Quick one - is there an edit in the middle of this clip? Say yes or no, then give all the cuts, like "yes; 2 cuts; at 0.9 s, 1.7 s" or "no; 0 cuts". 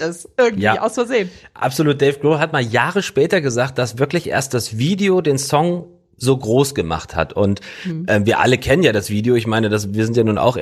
no; 0 cuts